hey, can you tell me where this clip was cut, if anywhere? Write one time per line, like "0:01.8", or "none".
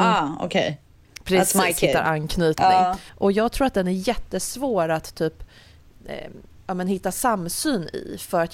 0:03.1